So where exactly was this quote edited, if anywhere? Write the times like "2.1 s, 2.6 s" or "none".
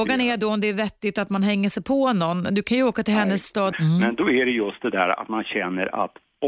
3.7 s